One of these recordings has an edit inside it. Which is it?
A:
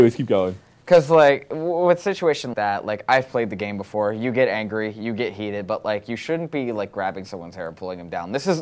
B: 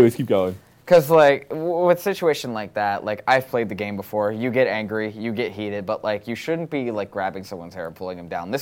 A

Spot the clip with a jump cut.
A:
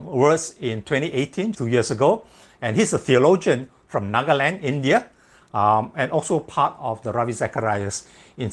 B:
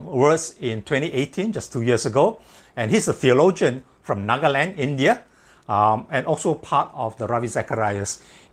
A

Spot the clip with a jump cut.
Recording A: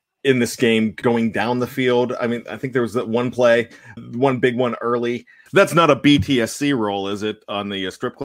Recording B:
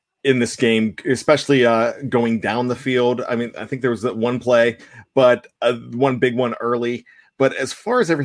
A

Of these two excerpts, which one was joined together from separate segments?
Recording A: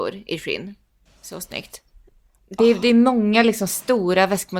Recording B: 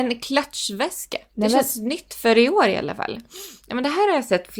B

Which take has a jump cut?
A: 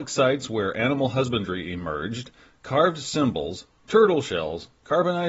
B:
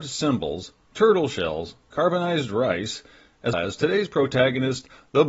B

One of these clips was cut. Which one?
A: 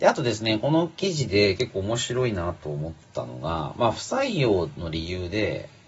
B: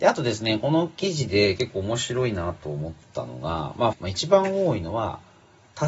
B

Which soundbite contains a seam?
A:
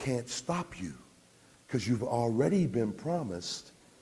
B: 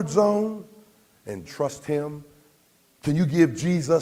B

